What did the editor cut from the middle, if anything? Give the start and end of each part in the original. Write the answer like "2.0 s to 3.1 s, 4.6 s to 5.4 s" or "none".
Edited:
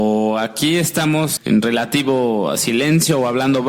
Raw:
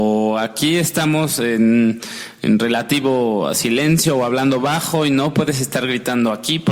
1.4 s to 2.3 s